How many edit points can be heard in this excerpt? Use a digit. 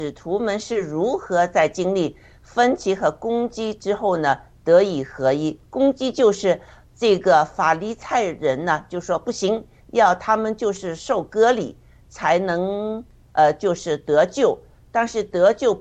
1